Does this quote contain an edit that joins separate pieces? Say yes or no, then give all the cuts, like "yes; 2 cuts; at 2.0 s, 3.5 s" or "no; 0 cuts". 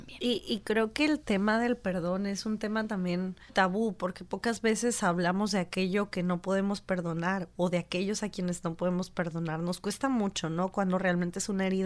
yes; 1 cut; at 3.5 s